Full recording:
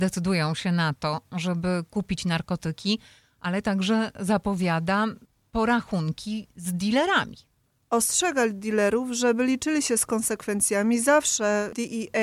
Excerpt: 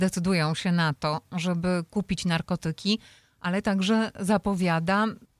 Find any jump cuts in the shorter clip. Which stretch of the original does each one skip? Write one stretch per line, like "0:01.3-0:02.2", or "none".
none